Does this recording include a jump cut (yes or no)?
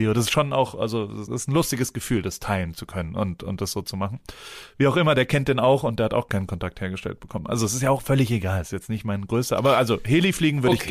yes